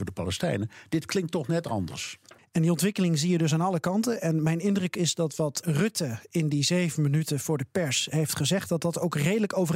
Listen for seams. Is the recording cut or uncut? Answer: cut